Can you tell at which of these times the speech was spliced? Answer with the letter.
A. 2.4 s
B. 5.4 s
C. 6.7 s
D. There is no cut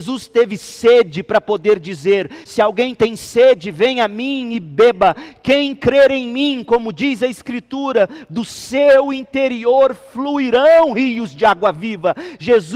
D